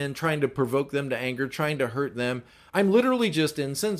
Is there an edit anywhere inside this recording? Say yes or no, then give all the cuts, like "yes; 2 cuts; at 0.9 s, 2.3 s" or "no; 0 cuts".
no; 0 cuts